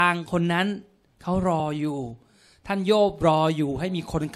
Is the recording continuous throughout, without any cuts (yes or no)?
yes